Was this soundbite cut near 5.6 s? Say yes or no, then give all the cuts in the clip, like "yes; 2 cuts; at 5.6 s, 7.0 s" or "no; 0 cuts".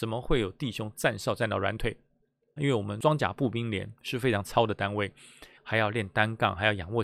yes; 2 cuts; at 2.6 s, 5.6 s